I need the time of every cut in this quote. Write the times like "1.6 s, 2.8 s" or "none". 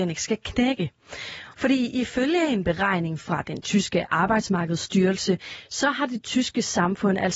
1.5 s